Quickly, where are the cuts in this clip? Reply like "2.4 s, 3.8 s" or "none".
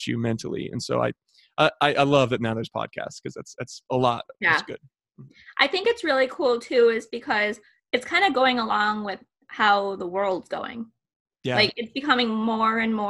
none